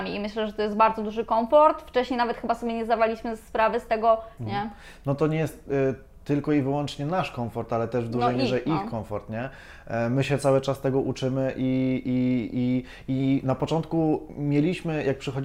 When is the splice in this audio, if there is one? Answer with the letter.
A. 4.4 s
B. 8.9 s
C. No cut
A